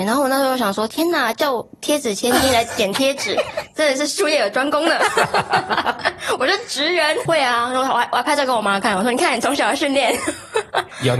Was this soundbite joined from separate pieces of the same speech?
yes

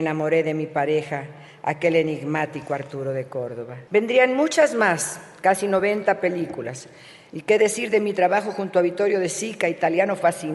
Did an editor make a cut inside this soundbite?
yes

